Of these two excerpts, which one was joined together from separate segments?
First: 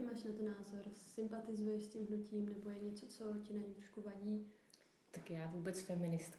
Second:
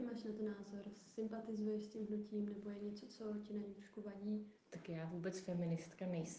second; 1 cut; at 4.6 s

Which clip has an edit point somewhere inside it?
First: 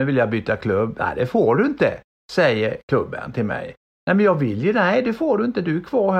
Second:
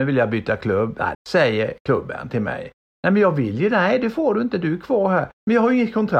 second; 1 cut; at 1.1 s

